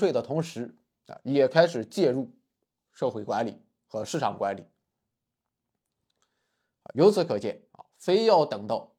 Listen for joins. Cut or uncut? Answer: uncut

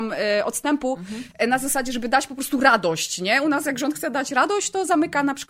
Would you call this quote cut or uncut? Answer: uncut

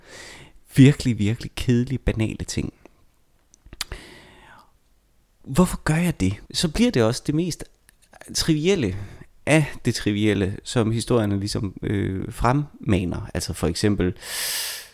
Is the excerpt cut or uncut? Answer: cut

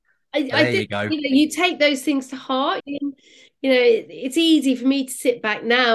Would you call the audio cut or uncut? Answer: cut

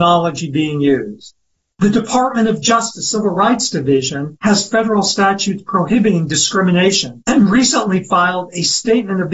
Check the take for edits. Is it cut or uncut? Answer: uncut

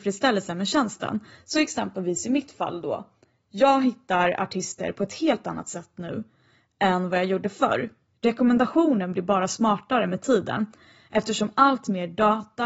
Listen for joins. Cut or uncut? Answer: uncut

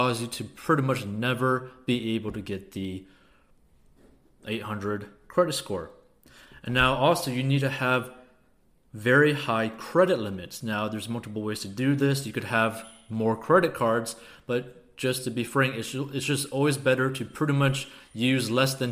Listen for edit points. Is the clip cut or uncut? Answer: uncut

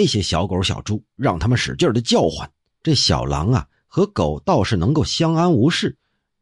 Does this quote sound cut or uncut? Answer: cut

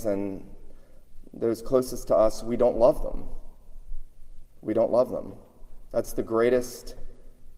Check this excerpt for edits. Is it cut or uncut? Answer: uncut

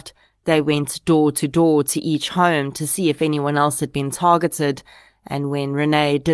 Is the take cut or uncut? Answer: uncut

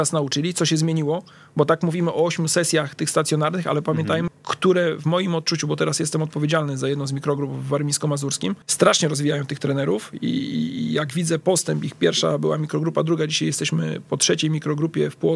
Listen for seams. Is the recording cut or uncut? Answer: cut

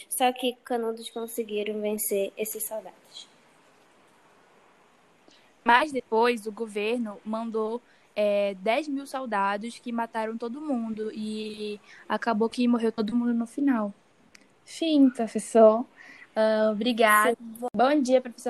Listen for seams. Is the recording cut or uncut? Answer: cut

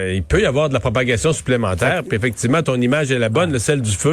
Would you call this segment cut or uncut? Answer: uncut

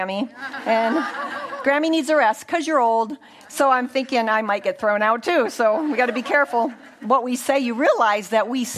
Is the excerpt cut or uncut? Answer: uncut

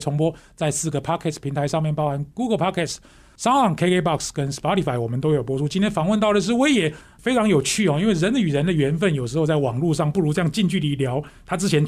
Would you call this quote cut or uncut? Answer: uncut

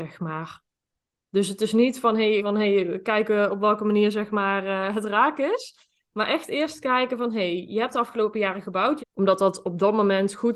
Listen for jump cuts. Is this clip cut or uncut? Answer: cut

